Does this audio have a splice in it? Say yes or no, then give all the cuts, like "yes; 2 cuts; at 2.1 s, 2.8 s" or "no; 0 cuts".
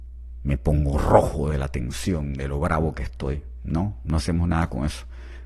no; 0 cuts